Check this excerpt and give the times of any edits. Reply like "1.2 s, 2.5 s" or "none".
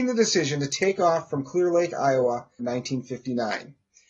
2.6 s